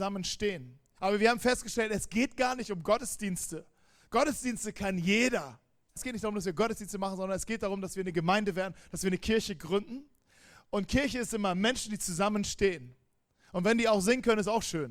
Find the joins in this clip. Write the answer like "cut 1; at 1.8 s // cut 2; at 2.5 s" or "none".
cut 1; at 1.0 s // cut 2; at 6.0 s